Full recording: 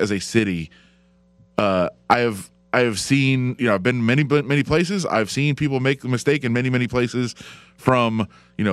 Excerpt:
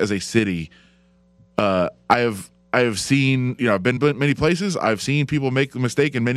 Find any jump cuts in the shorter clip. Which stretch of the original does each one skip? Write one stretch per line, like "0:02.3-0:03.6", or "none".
0:04.0-0:04.3